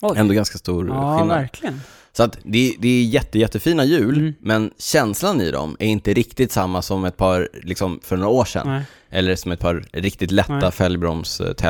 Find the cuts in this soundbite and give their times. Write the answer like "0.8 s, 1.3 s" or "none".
8.0 s